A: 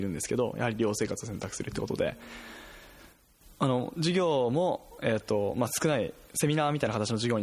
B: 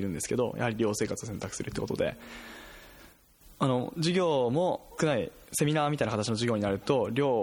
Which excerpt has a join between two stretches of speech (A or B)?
B